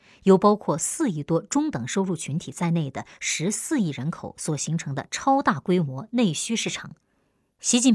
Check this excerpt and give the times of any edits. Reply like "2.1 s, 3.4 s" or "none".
none

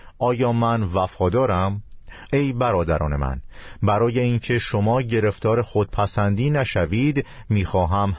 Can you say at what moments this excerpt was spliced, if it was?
2.3 s

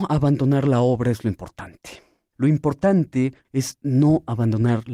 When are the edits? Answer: 2.3 s, 3.4 s

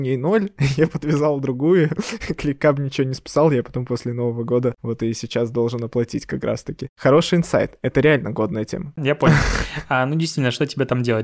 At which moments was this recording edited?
9.0 s

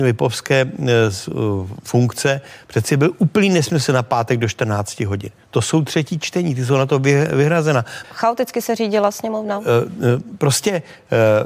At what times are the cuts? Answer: 1.2 s, 8.0 s

